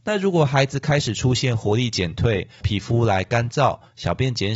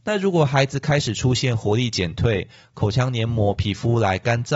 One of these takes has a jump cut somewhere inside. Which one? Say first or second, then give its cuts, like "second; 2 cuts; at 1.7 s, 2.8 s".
first; 1 cut; at 2.6 s